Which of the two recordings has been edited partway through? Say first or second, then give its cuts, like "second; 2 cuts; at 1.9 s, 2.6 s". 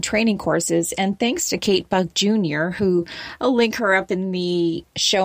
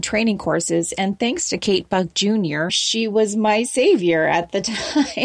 second; 1 cut; at 2.7 s